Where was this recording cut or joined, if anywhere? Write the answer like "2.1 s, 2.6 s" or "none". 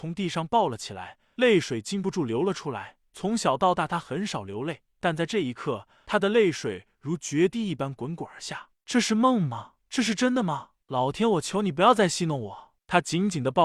none